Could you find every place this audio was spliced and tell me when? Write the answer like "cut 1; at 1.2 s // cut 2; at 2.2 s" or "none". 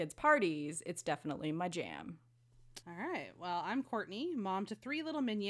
cut 1; at 2.8 s